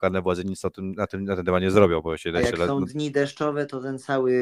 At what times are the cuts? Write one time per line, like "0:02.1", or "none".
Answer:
none

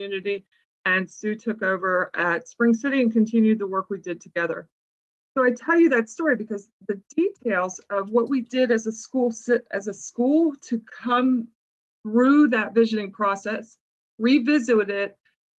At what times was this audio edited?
none

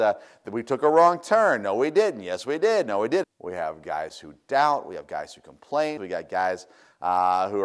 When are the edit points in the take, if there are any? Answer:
0:03.2
0:06.0

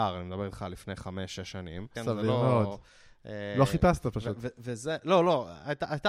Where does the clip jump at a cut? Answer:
0:02.0

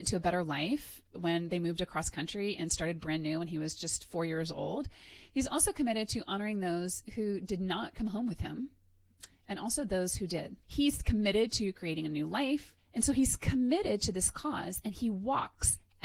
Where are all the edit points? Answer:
0:10.6
0:12.8

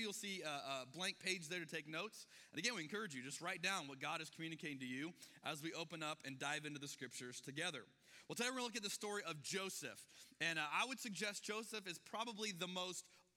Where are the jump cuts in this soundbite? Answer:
none

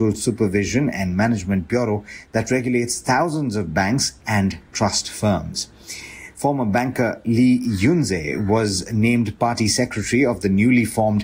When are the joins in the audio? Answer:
0:04.2
0:06.3

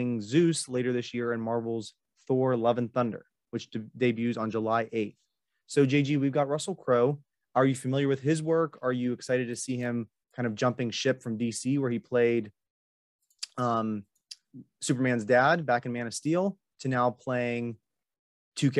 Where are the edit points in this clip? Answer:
none

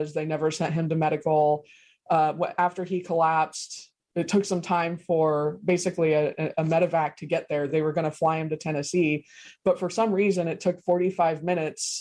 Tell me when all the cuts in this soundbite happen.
none

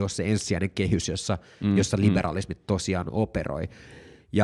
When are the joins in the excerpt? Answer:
none

